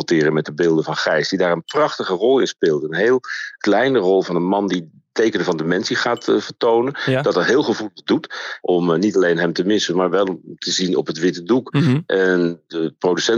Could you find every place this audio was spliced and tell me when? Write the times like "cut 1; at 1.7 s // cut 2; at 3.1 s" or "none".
cut 1; at 8.6 s